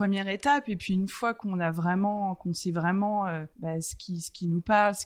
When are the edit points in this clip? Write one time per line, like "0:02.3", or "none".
0:03.5